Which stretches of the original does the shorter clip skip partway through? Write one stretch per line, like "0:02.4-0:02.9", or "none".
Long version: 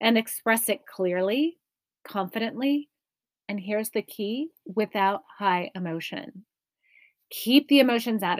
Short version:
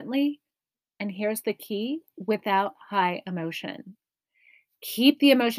none